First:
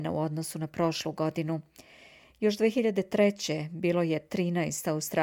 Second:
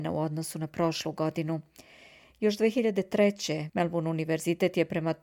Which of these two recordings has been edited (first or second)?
second